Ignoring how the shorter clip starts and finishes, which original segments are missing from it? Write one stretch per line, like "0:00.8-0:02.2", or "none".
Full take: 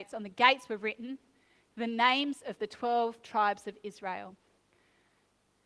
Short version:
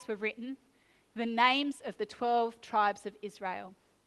none